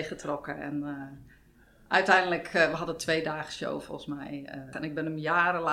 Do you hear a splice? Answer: yes; 1 cut; at 4.7 s

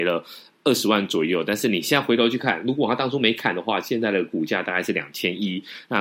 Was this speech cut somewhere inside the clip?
no; 0 cuts

